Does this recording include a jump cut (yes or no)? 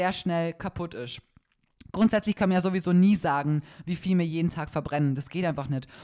no